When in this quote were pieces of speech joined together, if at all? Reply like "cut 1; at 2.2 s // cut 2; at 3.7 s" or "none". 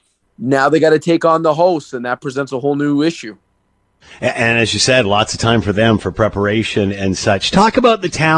none